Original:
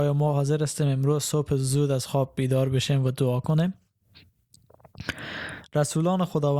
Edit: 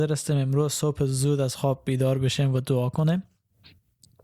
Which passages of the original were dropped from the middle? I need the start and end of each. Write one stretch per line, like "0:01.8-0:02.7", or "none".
none